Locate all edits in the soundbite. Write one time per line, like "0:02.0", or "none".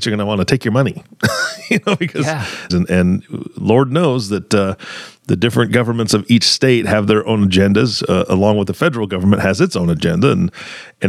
0:02.7

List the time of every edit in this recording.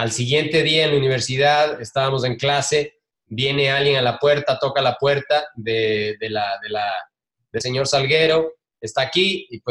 0:07.6

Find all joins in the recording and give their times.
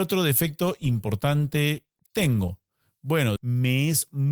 0:03.4

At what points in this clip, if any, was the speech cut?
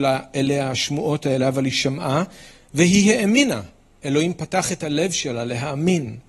none

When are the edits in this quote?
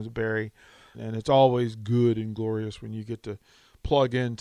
0:00.9

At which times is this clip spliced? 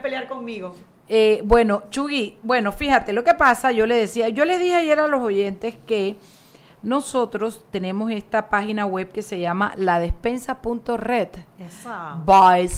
none

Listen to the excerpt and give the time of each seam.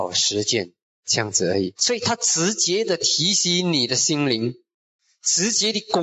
0:01.7

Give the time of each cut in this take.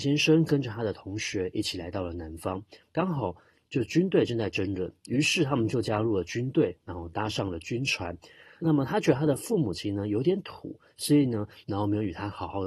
0:08.6
0:11.6

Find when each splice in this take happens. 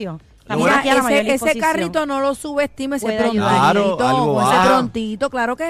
0:03.0

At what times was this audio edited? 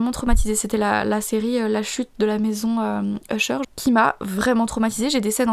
0:03.6

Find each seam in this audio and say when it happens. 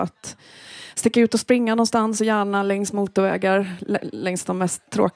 none

